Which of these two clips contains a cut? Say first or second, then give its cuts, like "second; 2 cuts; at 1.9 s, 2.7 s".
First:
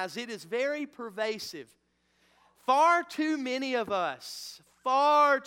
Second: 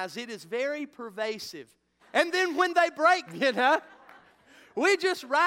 second; 2 cuts; at 2.0 s, 3.3 s